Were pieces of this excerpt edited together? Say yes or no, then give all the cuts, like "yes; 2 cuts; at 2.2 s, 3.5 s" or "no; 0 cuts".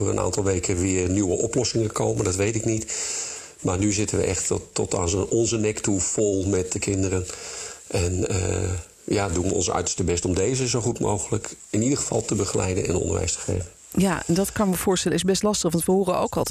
yes; 1 cut; at 8.9 s